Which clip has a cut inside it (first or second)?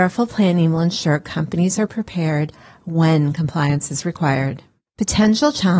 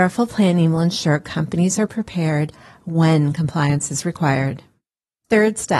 first